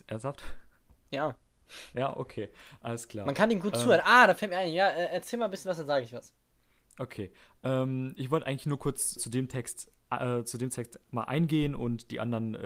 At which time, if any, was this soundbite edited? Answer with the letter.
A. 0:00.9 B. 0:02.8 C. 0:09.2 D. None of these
C